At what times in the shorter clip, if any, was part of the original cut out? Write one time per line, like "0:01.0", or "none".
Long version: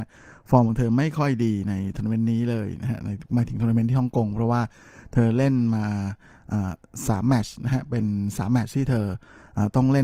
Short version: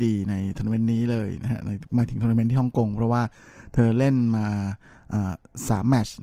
none